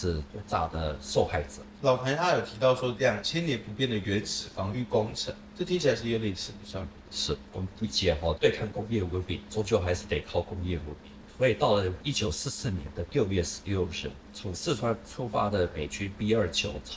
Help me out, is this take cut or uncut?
uncut